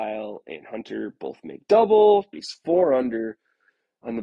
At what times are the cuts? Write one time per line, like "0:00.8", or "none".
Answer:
0:02.3

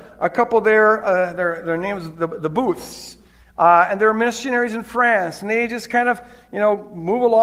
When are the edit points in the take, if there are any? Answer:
none

